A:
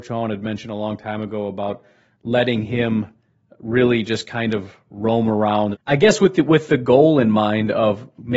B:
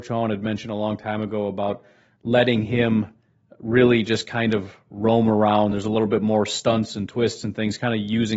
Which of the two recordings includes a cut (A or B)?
A